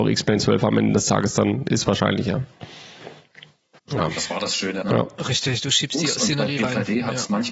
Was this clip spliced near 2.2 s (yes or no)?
no